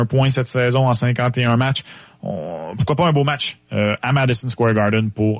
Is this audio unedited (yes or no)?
yes